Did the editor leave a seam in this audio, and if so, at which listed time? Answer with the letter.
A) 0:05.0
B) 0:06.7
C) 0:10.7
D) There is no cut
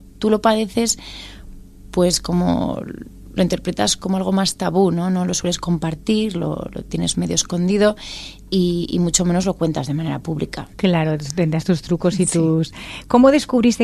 C